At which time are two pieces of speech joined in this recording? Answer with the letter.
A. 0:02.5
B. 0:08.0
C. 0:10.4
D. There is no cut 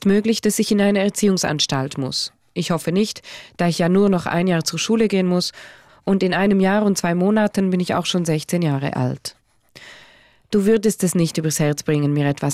D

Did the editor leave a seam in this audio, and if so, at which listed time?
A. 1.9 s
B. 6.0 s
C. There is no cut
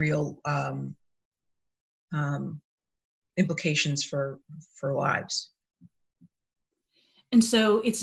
A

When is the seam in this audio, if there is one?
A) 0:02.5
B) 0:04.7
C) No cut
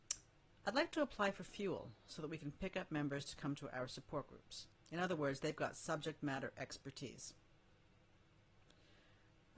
B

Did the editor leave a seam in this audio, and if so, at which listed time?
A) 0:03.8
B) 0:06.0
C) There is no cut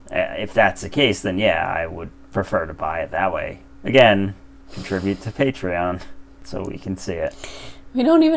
A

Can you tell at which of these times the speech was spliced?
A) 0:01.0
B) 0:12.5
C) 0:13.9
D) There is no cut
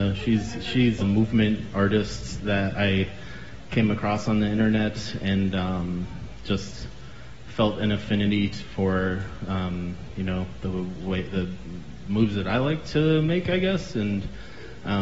A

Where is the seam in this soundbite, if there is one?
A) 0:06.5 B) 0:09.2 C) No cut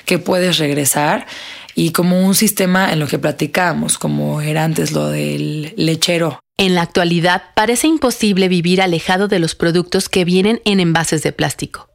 C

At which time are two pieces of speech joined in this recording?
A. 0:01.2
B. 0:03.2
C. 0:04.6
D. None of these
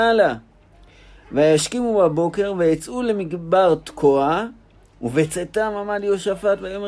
D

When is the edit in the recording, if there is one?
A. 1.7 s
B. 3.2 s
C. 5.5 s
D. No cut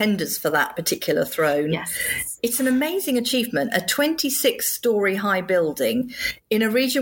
D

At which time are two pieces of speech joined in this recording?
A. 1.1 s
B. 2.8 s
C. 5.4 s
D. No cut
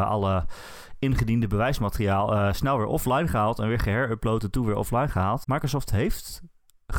C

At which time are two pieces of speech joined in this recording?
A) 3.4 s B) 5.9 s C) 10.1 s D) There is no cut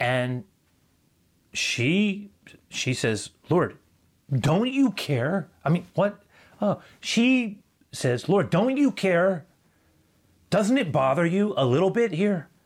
B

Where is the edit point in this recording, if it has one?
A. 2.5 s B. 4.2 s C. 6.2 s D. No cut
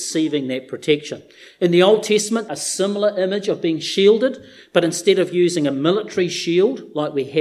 A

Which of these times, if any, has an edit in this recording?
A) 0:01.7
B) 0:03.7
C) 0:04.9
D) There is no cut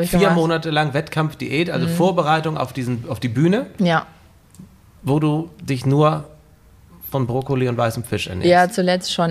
D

